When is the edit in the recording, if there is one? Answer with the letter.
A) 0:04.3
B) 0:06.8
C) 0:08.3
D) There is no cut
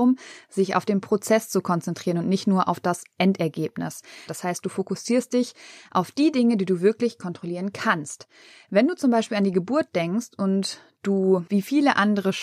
A